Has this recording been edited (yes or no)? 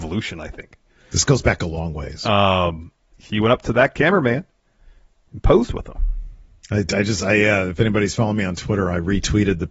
yes